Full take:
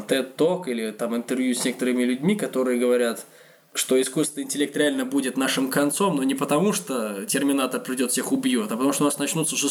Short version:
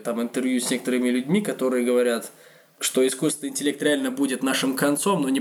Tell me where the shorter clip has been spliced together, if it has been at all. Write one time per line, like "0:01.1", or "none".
none